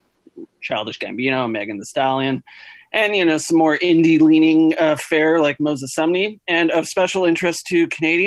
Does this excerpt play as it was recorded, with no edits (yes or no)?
yes